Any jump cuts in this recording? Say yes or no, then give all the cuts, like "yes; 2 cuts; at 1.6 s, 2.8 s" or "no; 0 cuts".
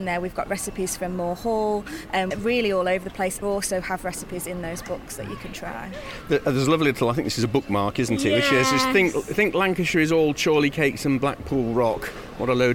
yes; 2 cuts; at 2.3 s, 3.4 s